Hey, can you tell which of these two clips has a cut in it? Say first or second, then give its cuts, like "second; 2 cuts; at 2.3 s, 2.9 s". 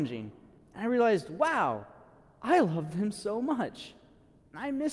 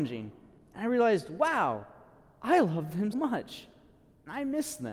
second; 1 cut; at 3.1 s